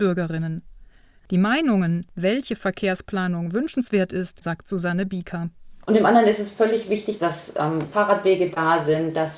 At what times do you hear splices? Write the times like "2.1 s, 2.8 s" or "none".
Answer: 4.4 s, 5.8 s, 7.2 s